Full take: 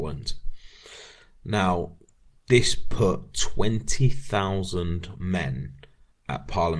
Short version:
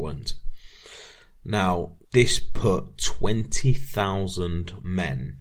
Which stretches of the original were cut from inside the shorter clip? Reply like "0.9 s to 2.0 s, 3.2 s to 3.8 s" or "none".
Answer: 2.0 s to 2.4 s